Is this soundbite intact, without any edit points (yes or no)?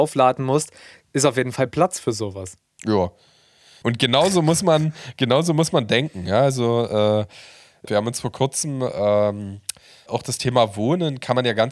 no